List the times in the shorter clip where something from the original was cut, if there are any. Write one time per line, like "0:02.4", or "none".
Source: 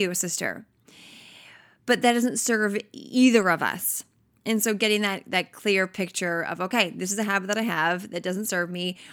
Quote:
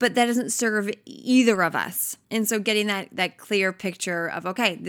0:02.2